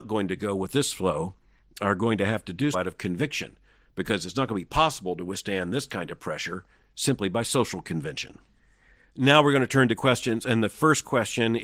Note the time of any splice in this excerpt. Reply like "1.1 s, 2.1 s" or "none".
2.7 s